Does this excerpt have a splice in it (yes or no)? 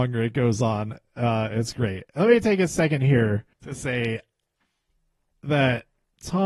yes